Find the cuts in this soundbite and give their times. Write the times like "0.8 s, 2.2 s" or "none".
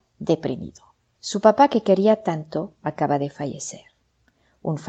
none